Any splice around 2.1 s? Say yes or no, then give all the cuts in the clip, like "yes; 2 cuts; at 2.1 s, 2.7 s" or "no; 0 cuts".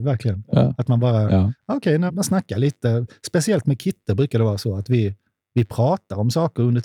yes; 1 cut; at 2.1 s